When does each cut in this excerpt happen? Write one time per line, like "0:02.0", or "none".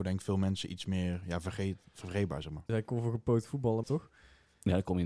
0:02.7
0:03.8

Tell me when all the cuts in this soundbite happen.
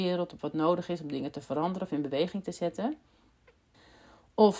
none

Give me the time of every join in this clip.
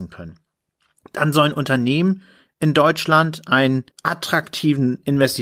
0:03.9

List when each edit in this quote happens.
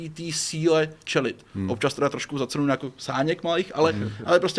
none

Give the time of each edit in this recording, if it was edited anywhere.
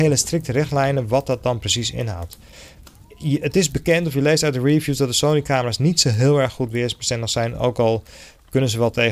none

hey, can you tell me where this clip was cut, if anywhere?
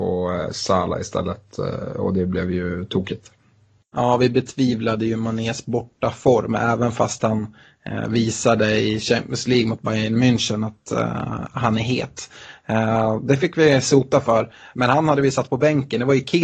0:14.7

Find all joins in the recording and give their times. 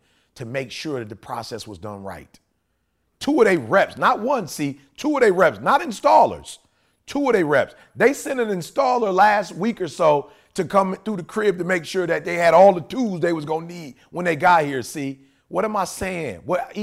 none

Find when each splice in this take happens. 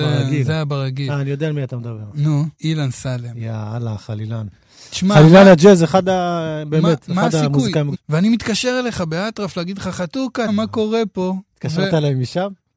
0:02.6
0:07.9
0:10.5

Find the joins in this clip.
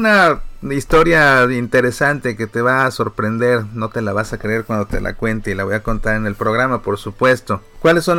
none

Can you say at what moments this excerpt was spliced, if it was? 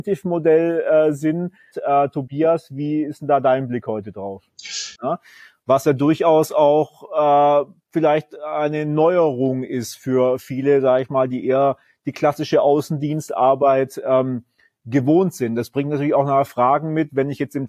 0:01.7
0:05.0

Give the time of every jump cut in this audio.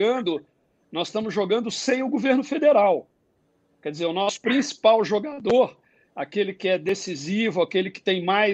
none

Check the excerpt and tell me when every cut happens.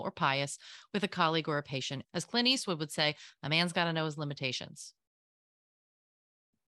0:02.0

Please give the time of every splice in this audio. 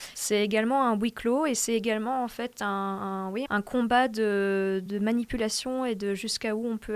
0:03.5
0:04.9

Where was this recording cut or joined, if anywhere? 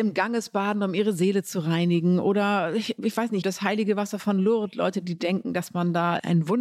0:03.4

